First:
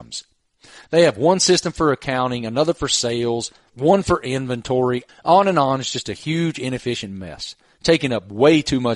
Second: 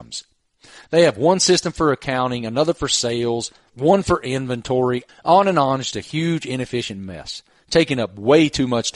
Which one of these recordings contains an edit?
second; 1 cut; at 5.9 s

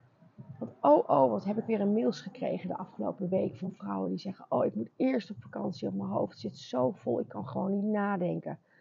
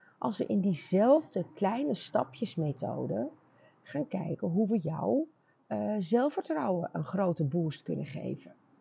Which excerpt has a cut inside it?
first; 1 cut; at 1.0 s

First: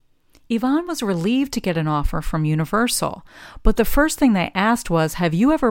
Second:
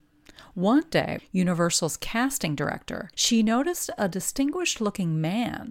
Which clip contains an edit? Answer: second; 2 cuts; at 1.2 s, 3.1 s

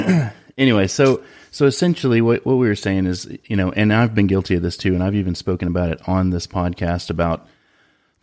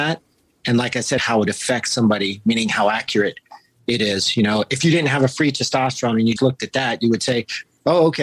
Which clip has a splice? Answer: second; 2 cuts; at 1.2 s, 6.4 s

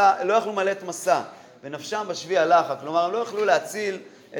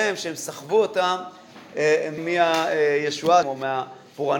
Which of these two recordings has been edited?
second; 2 cuts; at 2.2 s, 3.4 s

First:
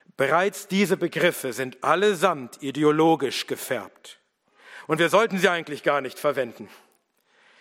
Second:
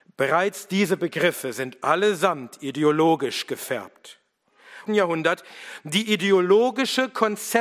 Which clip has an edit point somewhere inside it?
second; 1 cut; at 4.9 s

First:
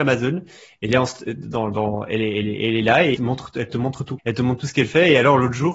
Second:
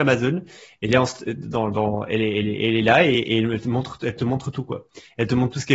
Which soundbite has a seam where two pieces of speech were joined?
first; 2 cuts; at 3.1 s, 4.2 s

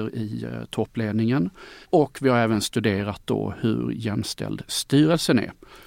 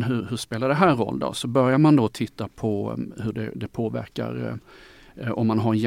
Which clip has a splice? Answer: first; 1 cut; at 1.8 s

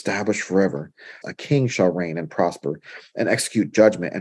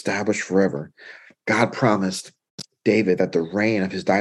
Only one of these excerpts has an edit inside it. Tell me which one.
first; 1 cut; at 1.2 s

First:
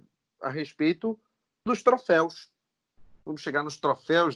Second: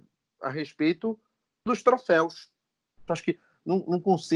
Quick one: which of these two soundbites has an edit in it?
second; 1 cut; at 3.1 s

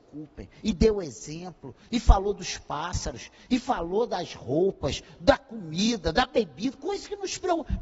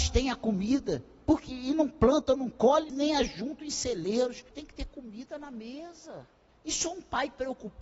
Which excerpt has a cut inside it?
second; 3 cuts; at 2.9 s, 4.5 s, 6.5 s

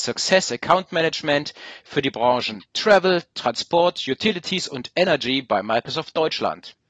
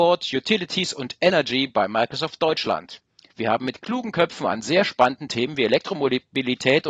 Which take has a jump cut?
second; 1 cut; at 3.3 s

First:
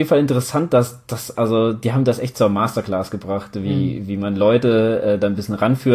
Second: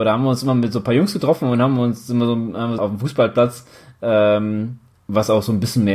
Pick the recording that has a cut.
second; 1 cut; at 2.8 s

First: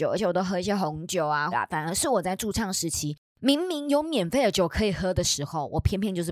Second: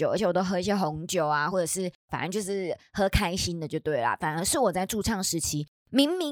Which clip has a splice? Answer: first; 1 cut; at 1.5 s

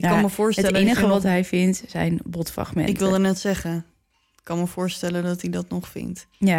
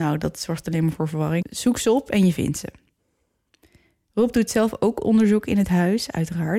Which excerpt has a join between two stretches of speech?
second; 1 cut; at 1.4 s

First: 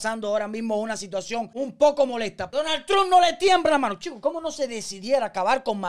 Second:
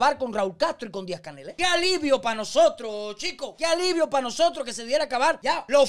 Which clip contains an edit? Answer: first; 1 cut; at 2.5 s

